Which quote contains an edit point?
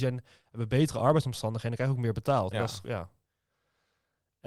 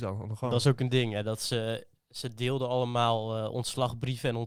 first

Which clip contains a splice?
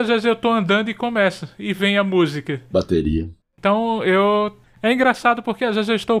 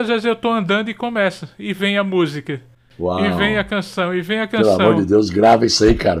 first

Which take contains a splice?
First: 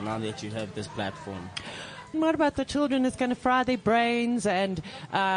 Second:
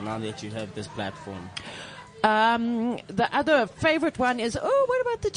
first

